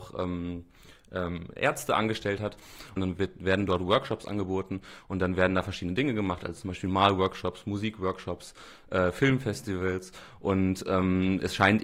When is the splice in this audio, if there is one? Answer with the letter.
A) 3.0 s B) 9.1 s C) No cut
A